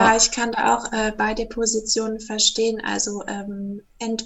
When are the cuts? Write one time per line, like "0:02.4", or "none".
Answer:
none

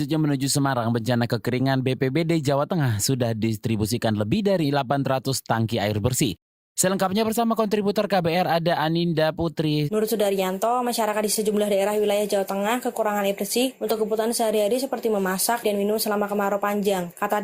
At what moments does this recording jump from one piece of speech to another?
0:09.9
0:15.6

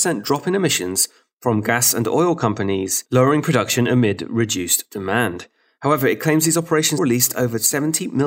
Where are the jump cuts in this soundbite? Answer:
0:07.0

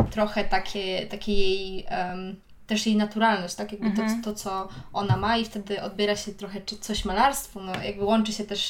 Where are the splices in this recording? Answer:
none

